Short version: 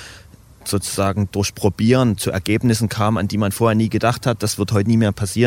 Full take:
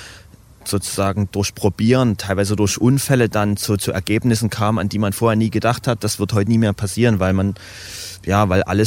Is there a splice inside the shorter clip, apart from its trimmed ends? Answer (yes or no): yes